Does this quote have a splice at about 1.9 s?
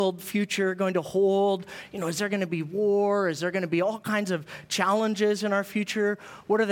no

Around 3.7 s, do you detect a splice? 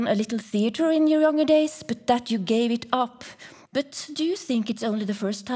yes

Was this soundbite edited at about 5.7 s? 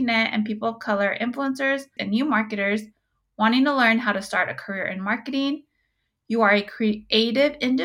no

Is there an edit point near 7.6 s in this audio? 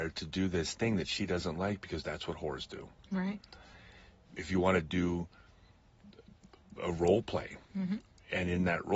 yes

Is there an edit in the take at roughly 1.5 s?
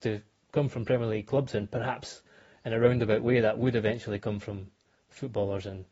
no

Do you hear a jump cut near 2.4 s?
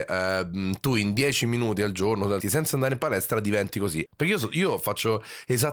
yes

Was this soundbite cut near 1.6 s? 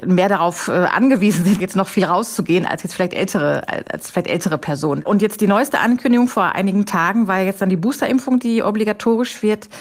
yes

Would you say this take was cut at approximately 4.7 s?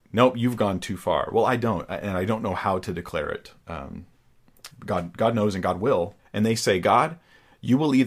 yes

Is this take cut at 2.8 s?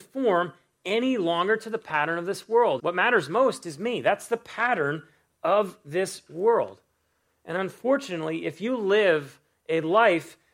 yes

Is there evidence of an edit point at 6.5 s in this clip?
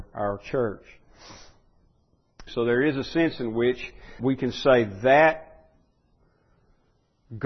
no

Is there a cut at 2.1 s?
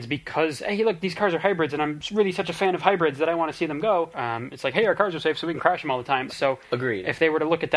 no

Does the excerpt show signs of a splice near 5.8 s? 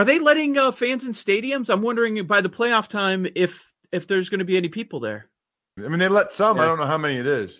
yes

